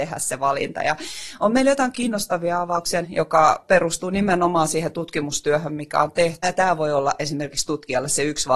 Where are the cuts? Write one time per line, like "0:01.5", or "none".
0:01.9
0:03.0
0:06.4